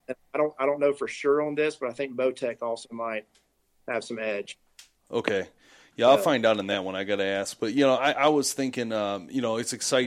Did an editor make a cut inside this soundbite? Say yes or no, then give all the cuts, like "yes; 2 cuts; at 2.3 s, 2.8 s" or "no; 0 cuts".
no; 0 cuts